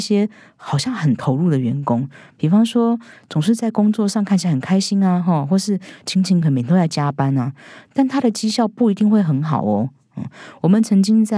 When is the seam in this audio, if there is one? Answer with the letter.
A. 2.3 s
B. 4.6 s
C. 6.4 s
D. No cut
C